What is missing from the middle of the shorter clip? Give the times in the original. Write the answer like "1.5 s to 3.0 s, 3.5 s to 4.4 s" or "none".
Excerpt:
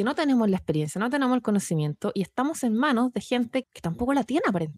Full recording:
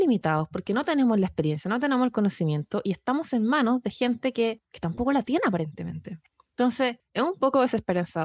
4.3 s to 4.6 s